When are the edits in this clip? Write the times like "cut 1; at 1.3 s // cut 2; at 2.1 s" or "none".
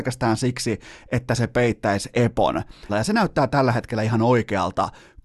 cut 1; at 2.9 s